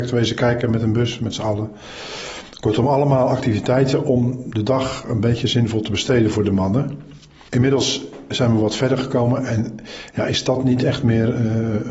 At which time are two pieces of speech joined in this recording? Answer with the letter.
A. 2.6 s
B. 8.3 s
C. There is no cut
B